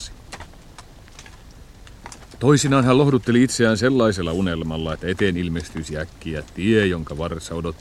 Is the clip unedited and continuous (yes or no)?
yes